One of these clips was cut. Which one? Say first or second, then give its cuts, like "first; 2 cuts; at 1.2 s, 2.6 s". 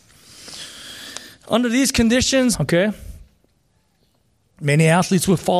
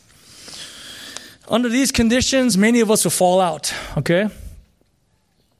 first; 1 cut; at 2.5 s